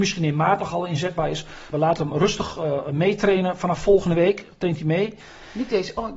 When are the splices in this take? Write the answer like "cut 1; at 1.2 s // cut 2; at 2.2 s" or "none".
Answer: cut 1; at 1.7 s